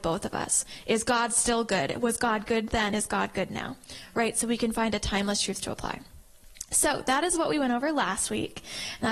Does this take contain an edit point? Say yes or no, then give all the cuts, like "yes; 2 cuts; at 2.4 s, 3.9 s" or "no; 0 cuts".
no; 0 cuts